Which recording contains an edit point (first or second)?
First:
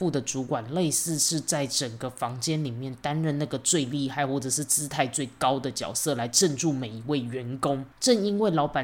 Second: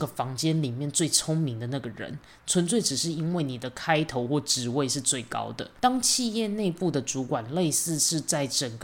second